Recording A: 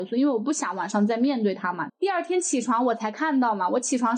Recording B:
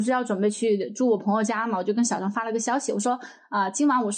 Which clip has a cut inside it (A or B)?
A